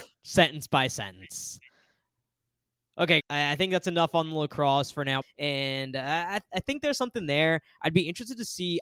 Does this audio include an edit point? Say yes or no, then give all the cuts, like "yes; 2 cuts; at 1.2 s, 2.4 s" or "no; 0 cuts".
yes; 2 cuts; at 3.2 s, 5.2 s